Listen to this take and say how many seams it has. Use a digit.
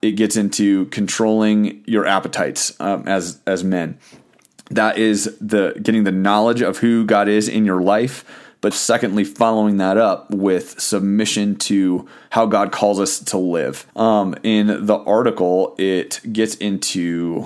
2